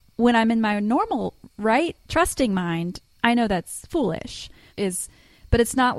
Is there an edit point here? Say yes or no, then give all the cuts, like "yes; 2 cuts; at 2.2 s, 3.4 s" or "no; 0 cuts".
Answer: yes; 2 cuts; at 2.0 s, 4.7 s